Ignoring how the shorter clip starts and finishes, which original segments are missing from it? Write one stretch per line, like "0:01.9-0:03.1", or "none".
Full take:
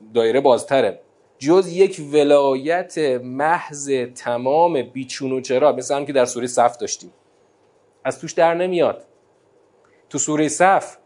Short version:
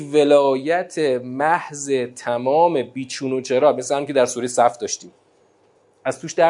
none